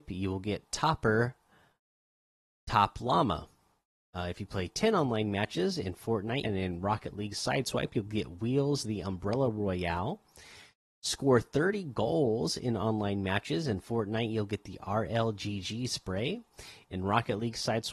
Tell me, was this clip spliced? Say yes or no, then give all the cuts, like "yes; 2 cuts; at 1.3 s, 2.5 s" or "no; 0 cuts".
yes; 1 cut; at 6.4 s